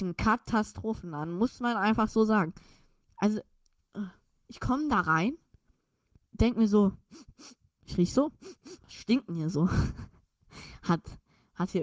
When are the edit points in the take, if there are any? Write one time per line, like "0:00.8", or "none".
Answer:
0:08.8